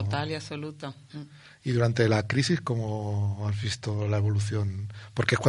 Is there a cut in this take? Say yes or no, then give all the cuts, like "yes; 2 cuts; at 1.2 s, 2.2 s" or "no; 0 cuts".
yes; 1 cut; at 1.1 s